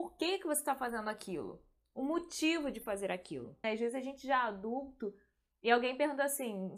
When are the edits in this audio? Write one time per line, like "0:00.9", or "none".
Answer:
0:03.6

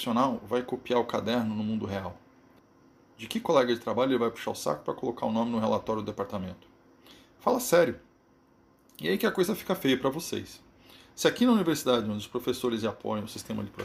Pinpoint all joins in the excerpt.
none

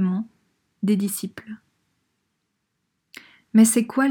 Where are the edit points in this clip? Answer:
none

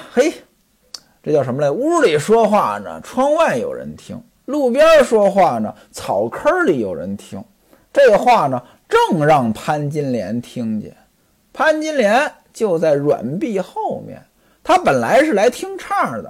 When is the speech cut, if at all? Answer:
none

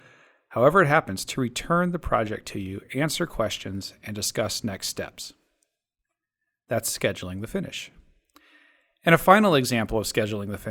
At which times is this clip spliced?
none

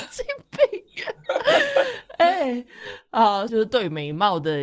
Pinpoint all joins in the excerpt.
0:03.5

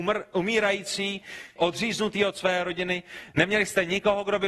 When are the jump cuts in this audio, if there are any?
0:01.6

